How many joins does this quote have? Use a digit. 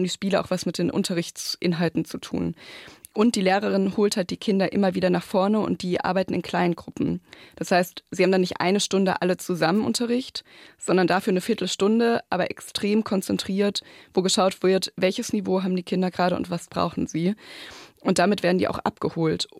0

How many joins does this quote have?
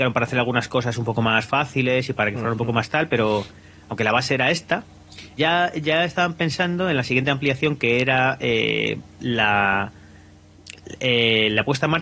1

